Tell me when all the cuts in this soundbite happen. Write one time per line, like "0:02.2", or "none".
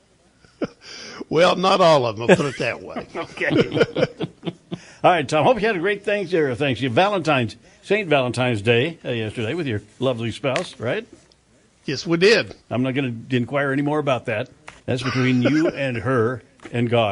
0:12.6
0:14.8